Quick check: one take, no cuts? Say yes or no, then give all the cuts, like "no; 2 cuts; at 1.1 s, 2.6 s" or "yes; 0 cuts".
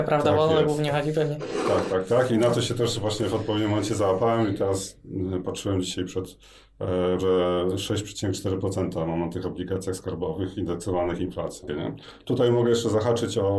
no; 2 cuts; at 7.2 s, 11.7 s